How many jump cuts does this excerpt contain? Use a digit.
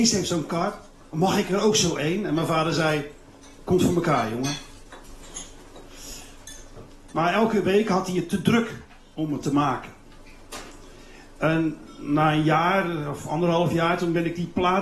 1